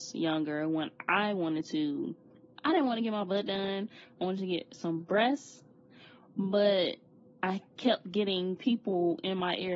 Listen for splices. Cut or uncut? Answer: uncut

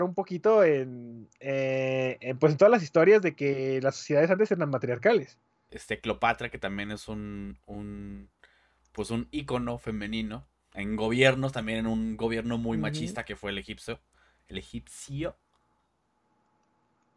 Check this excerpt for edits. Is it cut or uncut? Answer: cut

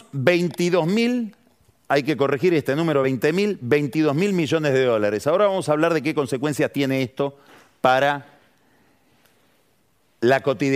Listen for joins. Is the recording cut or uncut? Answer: uncut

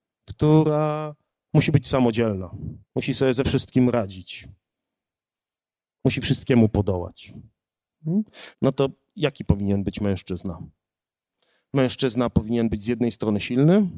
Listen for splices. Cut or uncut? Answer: cut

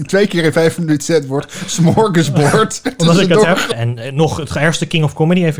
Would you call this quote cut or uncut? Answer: cut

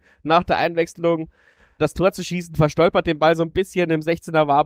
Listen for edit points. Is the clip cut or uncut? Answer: cut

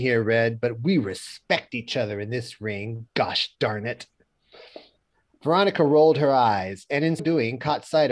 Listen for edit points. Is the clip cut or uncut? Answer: cut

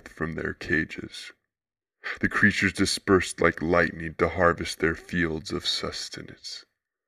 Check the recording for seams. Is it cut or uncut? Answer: uncut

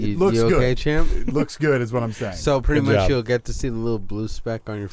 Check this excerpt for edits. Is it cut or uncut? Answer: uncut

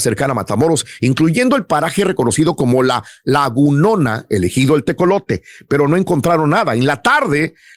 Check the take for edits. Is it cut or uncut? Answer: uncut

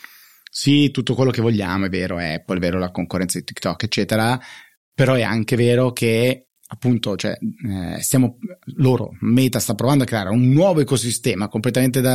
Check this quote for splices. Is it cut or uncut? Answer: uncut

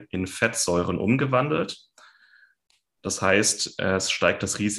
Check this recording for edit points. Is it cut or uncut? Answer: uncut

